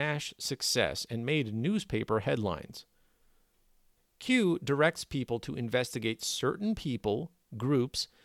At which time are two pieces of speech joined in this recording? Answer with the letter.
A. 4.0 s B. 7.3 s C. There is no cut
A